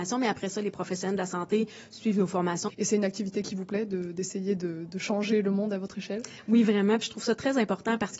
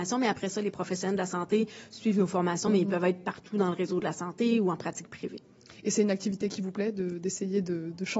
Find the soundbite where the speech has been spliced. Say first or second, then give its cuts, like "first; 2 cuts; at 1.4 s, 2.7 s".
first; 1 cut; at 2.7 s